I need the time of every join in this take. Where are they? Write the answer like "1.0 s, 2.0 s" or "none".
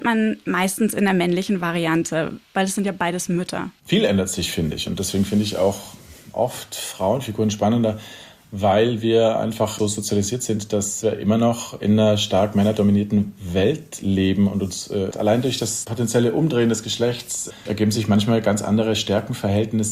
2.4 s, 15.1 s